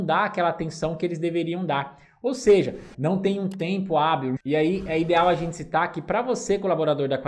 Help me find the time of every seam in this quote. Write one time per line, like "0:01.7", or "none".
0:02.9
0:04.4